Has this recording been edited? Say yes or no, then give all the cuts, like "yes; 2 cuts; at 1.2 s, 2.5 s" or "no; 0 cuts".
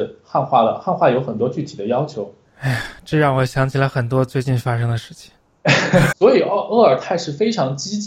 yes; 2 cuts; at 2.4 s, 6.1 s